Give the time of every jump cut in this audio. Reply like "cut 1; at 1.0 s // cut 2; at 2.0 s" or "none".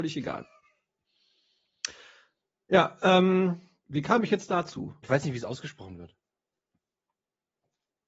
cut 1; at 5.0 s